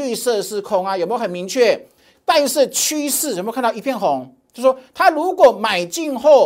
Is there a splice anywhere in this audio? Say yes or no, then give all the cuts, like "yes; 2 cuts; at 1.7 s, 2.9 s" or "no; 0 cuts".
yes; 1 cut; at 2.1 s